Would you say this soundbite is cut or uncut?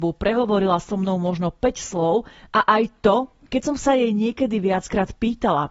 uncut